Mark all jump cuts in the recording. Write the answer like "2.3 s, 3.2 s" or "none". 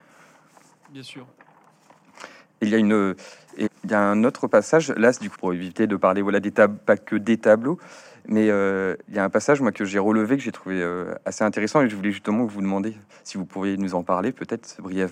3.7 s, 5.3 s